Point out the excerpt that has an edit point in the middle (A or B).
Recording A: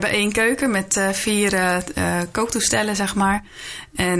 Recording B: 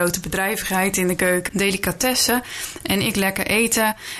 B